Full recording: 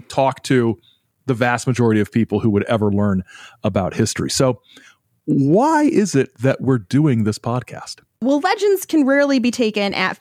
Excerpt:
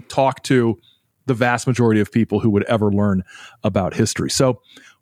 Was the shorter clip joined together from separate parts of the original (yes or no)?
no